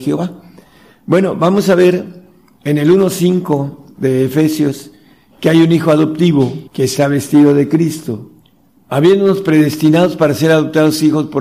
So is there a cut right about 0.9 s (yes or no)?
no